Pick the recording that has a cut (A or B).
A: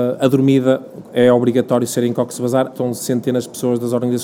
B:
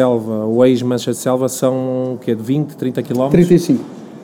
A